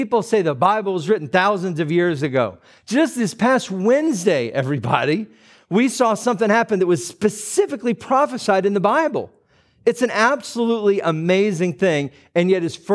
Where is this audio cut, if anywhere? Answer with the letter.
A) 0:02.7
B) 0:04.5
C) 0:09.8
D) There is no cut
D